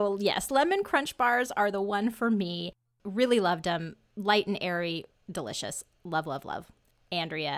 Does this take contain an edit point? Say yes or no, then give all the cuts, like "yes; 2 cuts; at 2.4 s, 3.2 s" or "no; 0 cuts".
yes; 1 cut; at 5.1 s